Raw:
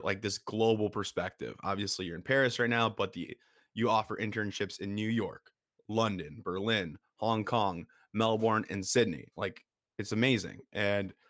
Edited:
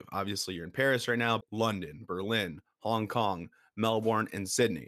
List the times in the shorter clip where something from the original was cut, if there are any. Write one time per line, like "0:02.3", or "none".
0:01.4